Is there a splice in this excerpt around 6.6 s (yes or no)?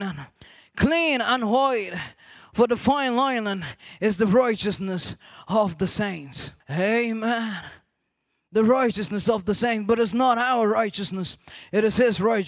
yes